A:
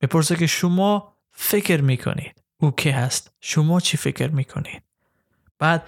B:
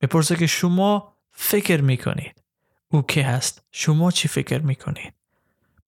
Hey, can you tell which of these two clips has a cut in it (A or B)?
A